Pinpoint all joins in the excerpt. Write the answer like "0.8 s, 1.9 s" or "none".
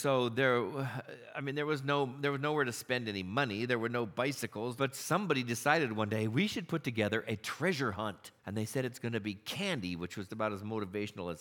4.8 s, 8.4 s, 10.3 s